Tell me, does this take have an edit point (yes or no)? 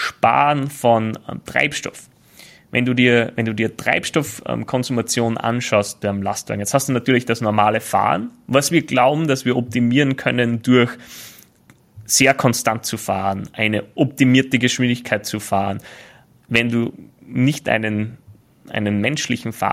no